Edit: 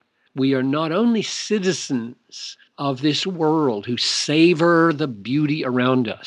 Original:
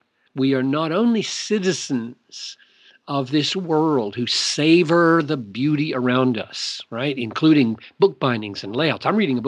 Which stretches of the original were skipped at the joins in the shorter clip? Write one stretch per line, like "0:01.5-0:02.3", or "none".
0:02.7-0:03.0